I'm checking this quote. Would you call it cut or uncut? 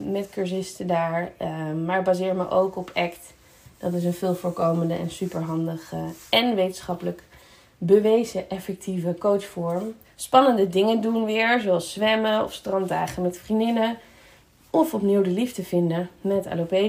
cut